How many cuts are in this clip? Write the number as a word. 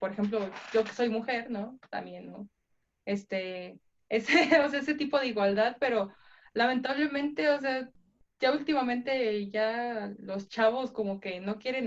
zero